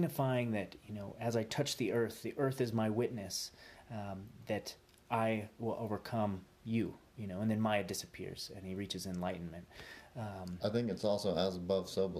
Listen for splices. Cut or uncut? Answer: uncut